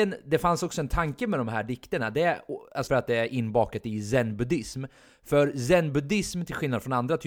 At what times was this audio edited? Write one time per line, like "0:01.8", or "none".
0:02.9